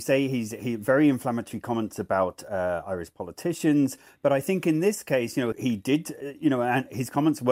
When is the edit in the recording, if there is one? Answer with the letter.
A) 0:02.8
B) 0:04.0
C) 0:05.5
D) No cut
C